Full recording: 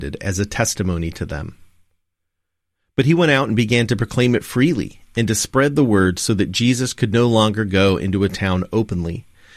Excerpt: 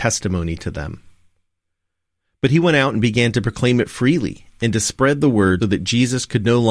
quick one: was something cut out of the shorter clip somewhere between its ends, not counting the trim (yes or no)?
yes